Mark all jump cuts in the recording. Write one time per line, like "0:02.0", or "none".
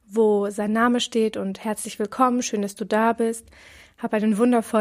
0:03.9